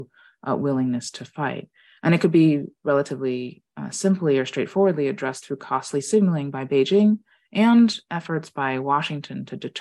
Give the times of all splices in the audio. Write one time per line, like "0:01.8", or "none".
none